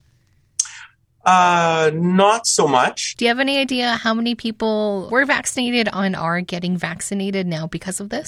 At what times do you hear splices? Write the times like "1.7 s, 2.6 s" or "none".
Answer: 3.1 s, 5.1 s